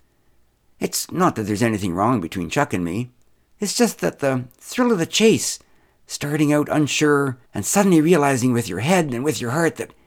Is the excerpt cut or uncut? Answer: cut